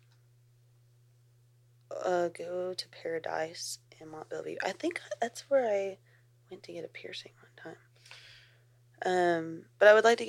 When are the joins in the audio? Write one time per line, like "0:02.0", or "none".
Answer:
none